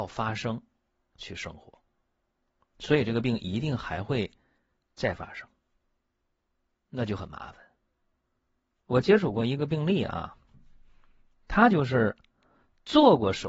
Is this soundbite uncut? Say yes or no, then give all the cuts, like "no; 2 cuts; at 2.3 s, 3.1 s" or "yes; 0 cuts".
yes; 0 cuts